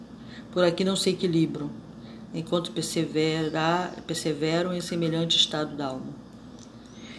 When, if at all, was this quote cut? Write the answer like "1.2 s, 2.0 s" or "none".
2.3 s